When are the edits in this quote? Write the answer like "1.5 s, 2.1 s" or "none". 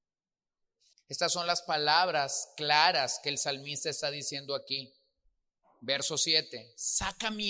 0.9 s